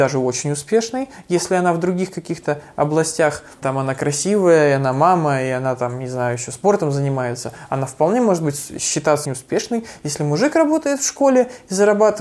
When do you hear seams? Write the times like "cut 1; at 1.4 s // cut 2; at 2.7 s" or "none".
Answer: cut 1; at 3.6 s // cut 2; at 9.2 s